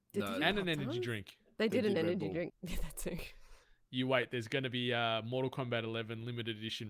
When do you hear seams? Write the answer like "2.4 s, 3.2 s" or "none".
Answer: 2.5 s